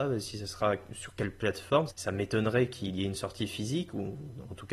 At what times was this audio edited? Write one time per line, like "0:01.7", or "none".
0:01.9

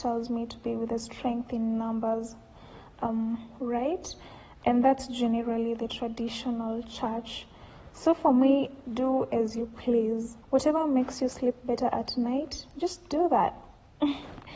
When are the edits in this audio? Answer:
0:08.8
0:10.4

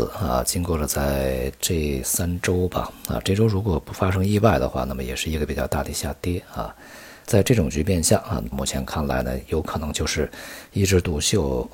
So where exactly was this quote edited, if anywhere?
0:07.3
0:08.5

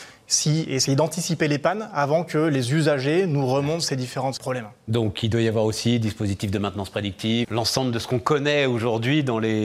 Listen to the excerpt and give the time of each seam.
0:04.4
0:07.4

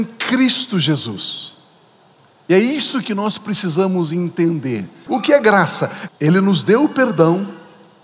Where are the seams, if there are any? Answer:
0:05.1
0:06.1

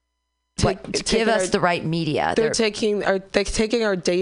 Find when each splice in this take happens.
none

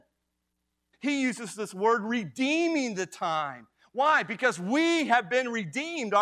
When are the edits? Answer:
0:00.9

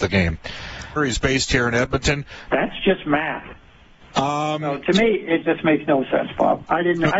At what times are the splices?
0:01.0
0:02.5
0:04.0

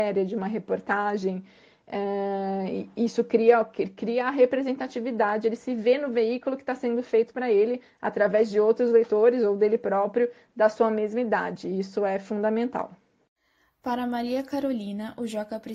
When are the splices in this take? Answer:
none

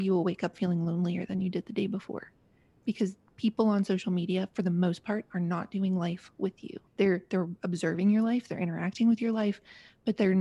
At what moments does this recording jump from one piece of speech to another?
0:06.9

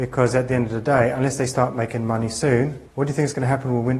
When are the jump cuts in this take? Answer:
0:02.9

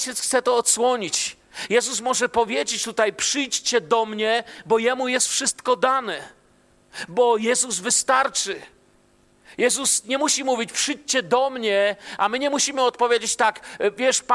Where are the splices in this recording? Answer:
0:01.7

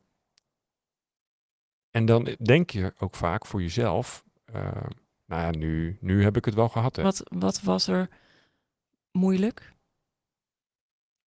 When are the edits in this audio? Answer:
0:07.0

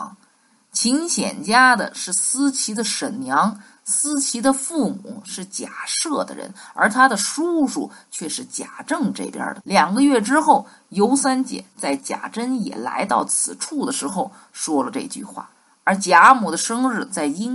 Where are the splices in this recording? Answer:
0:09.6

